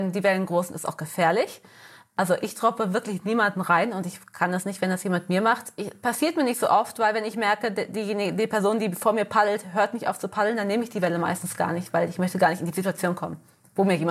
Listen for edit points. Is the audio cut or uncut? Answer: uncut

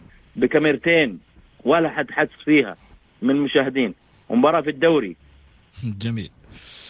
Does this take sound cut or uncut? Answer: uncut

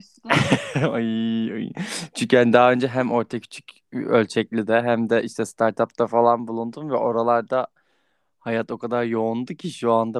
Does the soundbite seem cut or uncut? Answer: uncut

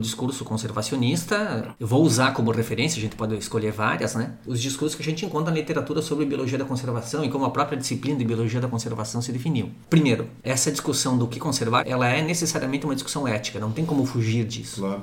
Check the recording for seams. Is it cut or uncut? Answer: uncut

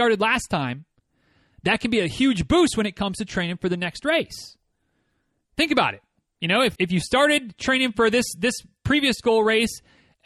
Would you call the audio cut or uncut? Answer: cut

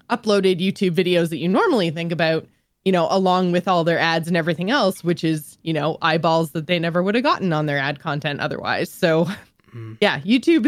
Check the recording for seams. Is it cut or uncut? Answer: uncut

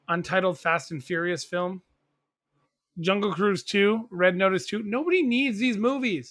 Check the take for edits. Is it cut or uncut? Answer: uncut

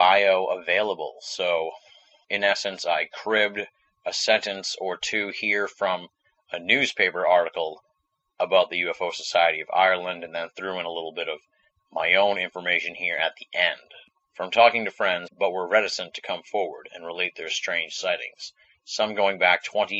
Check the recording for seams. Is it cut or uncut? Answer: cut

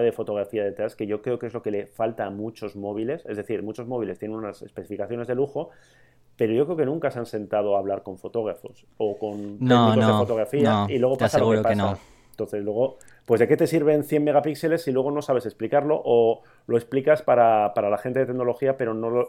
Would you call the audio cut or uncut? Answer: uncut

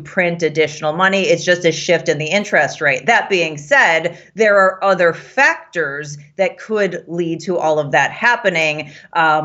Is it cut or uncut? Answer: uncut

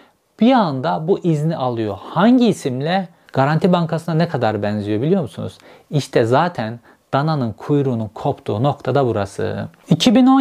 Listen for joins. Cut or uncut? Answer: cut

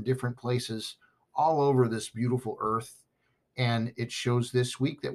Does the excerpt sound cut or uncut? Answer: uncut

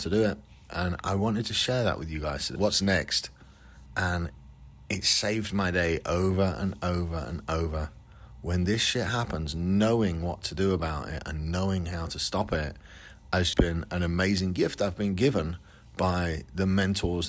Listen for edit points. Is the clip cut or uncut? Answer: cut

